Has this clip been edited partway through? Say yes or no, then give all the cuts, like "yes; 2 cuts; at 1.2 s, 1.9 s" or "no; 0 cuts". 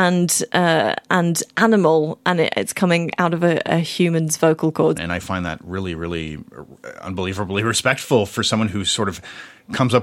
yes; 1 cut; at 4.9 s